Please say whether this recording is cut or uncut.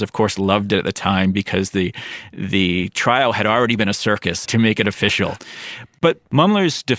cut